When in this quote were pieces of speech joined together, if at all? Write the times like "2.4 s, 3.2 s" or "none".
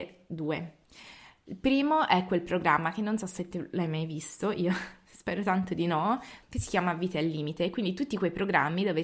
6.4 s